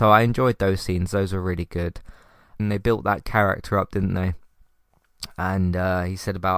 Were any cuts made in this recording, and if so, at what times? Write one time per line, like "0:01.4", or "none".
0:02.6